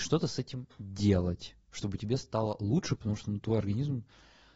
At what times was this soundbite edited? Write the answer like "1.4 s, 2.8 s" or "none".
none